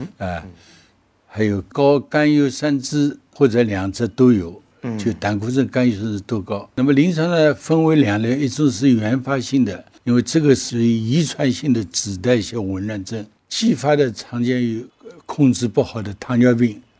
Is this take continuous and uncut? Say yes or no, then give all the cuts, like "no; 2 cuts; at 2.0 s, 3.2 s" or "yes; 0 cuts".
yes; 0 cuts